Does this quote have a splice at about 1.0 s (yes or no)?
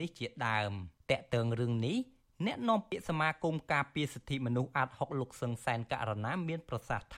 yes